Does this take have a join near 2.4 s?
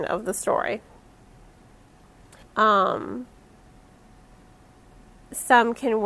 yes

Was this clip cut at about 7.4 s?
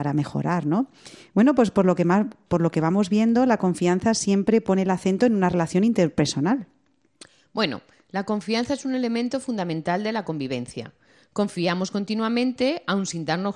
no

